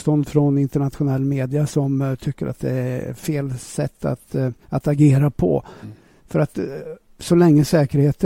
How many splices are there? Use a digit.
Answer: 2